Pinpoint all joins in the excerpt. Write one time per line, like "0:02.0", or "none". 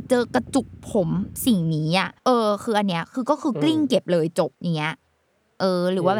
0:02.2
0:04.5

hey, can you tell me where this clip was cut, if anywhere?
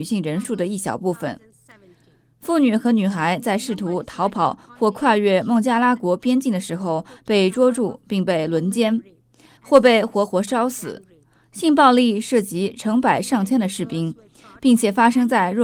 0:09.6

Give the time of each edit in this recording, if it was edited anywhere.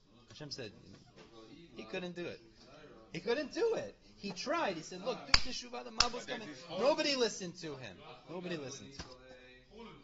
none

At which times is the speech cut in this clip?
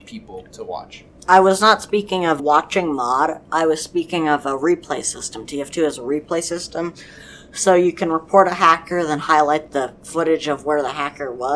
0:02.4

